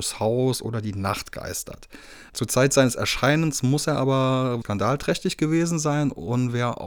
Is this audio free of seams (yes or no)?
no